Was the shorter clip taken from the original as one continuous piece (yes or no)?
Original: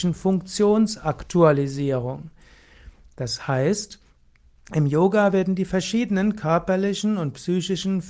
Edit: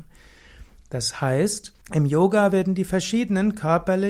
no